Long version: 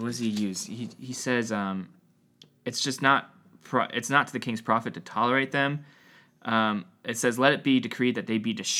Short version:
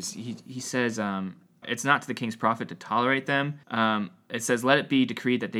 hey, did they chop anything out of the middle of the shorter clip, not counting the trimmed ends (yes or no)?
yes